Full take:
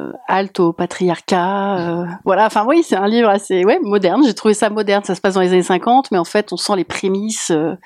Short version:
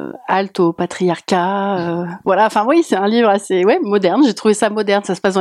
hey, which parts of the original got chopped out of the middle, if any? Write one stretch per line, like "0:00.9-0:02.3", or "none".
none